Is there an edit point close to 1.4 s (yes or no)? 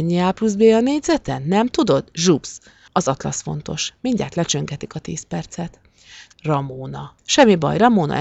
no